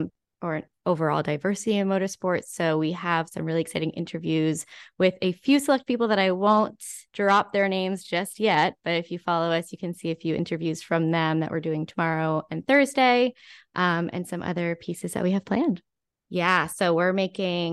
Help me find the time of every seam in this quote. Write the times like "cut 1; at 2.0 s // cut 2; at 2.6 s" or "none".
cut 1; at 7.1 s // cut 2; at 16.1 s